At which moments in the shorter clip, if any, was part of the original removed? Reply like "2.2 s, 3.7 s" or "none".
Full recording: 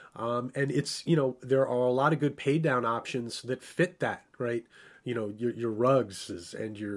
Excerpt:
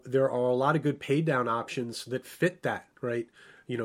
none

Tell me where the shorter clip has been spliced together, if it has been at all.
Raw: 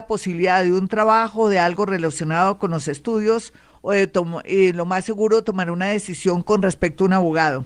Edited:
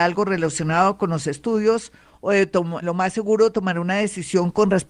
2.8 s

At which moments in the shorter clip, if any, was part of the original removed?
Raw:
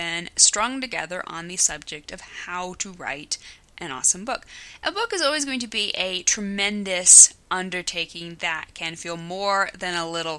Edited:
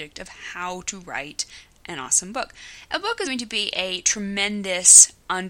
3.2 s

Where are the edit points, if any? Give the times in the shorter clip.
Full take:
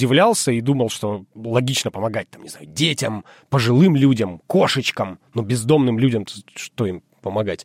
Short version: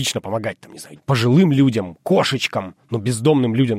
1.0 s

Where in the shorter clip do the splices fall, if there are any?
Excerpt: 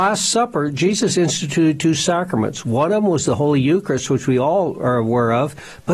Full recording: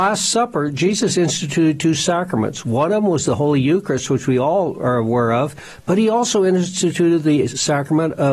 none

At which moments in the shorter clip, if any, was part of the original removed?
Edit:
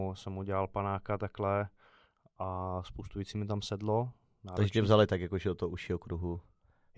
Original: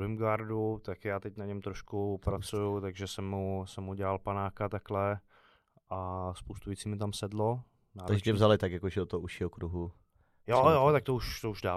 none

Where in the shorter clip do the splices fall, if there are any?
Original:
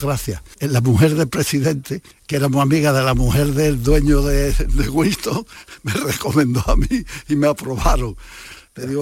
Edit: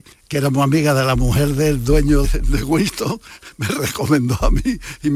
2.2 s

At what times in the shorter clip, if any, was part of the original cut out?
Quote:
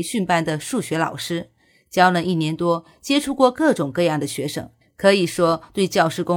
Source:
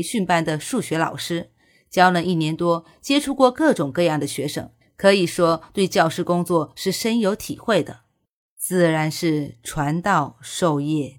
none

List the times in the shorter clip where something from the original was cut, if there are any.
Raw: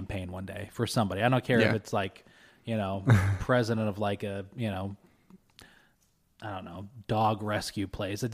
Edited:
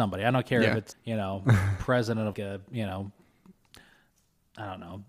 0.9 s, 2.3 s

